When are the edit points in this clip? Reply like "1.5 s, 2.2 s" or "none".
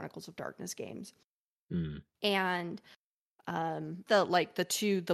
2.1 s, 4.1 s